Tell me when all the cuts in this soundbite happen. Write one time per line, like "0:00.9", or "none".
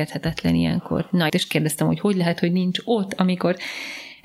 0:01.3